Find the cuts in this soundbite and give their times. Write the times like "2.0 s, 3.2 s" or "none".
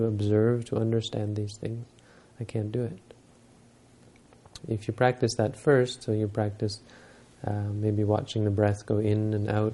4.6 s